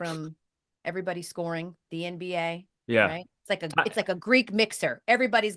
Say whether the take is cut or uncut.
uncut